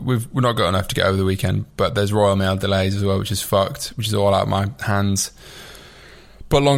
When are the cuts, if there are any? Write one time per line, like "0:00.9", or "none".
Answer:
none